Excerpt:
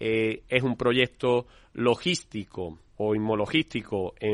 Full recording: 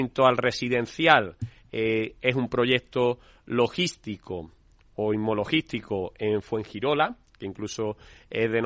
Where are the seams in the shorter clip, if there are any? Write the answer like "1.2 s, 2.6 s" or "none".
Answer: 2.9 s